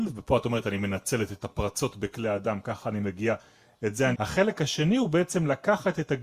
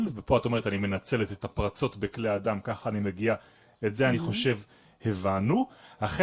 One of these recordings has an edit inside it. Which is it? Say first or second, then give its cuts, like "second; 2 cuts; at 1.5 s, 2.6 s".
first; 1 cut; at 4.1 s